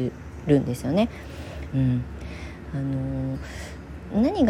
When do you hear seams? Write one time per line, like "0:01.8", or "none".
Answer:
0:01.7